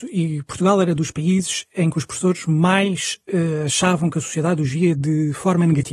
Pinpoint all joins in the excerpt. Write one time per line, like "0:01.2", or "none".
none

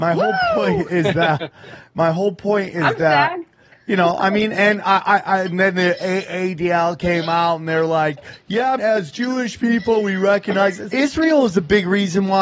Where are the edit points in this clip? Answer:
0:08.8
0:10.9

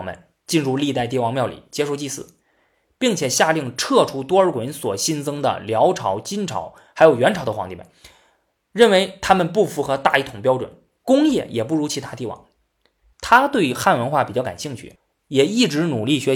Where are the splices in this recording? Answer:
0:13.1

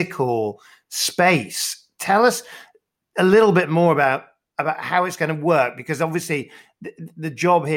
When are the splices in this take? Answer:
none

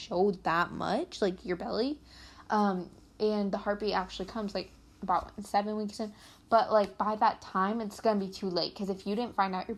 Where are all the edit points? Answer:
none

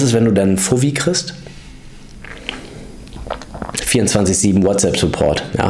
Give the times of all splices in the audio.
0:03.8

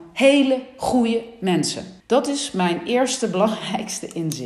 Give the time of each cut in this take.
0:02.0

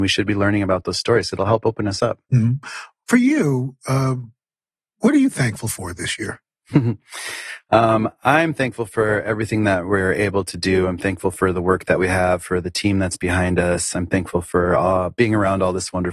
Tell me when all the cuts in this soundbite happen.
none

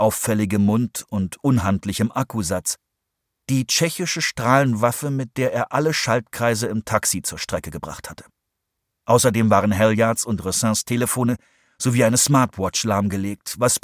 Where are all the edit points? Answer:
none

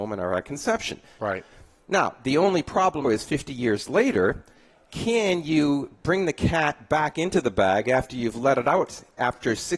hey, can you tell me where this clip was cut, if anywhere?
0:01.2
0:03.0

